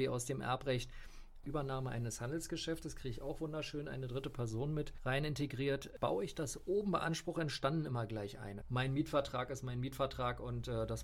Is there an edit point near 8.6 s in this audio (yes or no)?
yes